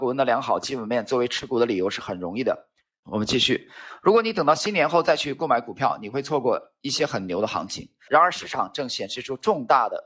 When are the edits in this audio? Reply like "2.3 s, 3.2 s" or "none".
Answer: 3.0 s, 8.1 s